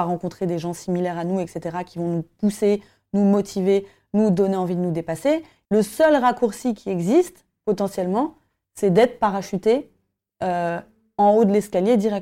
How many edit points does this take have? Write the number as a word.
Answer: one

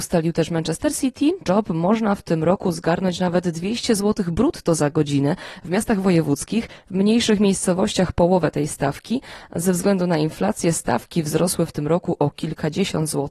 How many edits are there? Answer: one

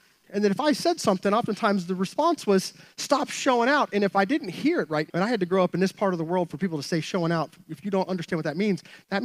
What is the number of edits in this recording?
one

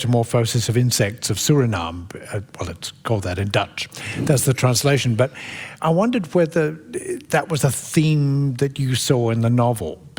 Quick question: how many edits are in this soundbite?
two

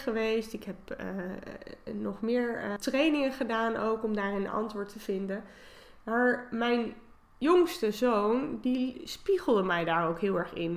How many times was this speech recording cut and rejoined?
one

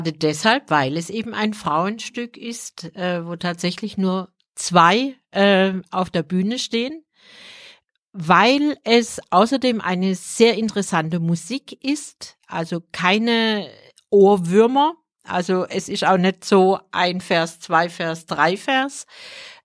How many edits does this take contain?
zero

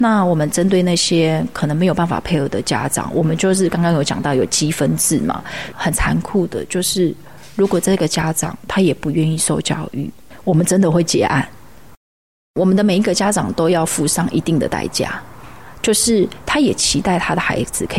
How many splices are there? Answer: one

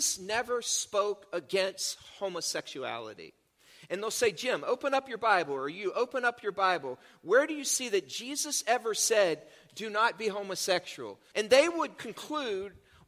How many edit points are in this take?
one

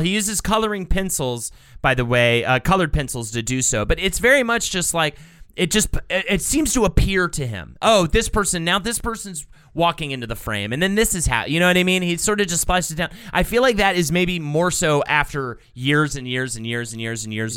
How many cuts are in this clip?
zero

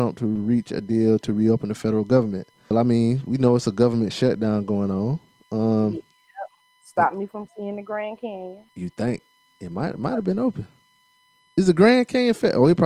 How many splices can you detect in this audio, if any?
two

